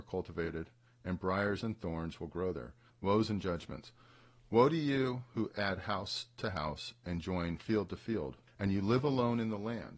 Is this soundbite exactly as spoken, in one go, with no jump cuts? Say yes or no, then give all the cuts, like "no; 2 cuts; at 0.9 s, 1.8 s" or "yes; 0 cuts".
no; 2 cuts; at 2.9 s, 8.5 s